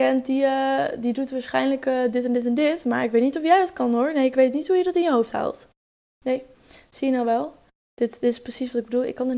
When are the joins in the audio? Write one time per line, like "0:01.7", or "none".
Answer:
0:06.1